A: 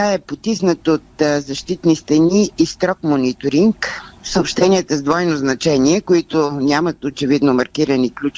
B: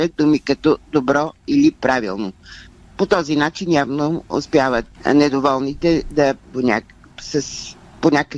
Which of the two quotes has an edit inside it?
B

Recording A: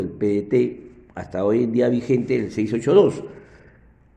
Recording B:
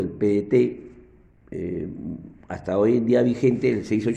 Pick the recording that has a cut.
A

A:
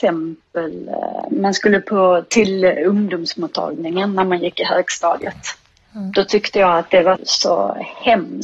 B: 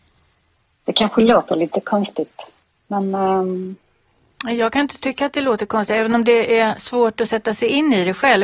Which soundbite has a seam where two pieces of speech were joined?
A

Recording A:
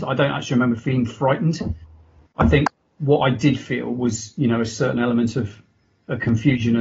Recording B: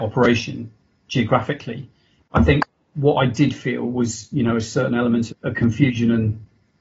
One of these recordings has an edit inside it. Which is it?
B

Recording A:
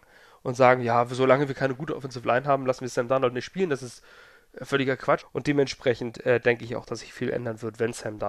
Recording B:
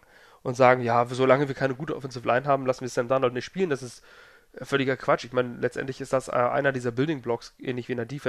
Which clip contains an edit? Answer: A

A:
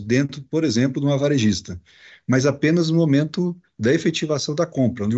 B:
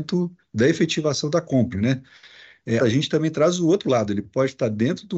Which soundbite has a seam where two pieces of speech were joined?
B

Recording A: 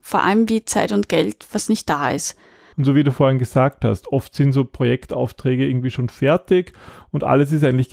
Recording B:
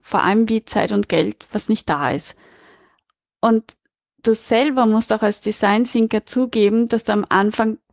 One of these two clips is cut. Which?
A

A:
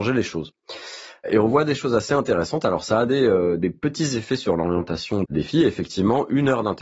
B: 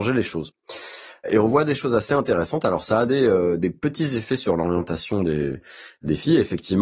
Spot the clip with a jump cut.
A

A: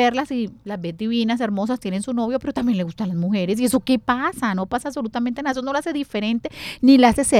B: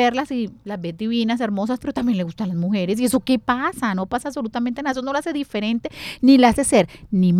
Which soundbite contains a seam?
B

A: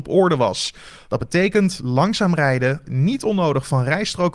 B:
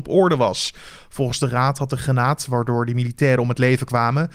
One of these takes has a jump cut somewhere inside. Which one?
A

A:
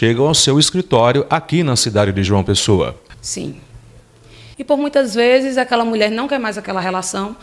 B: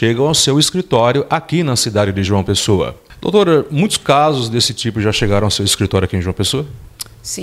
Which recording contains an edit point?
A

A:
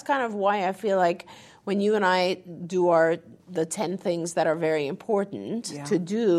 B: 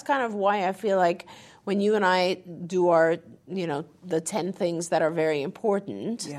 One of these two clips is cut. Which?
A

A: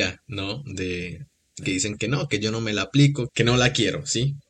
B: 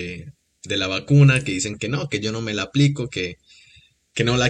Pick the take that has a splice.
A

